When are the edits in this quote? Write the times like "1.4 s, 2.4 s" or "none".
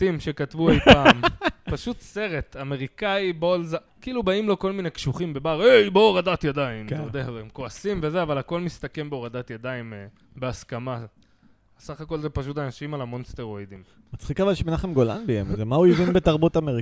3.9 s